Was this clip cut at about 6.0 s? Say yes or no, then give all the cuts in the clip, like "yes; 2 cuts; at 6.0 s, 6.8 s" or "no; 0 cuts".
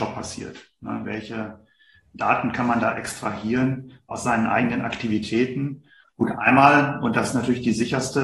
yes; 2 cuts; at 1.0 s, 6.0 s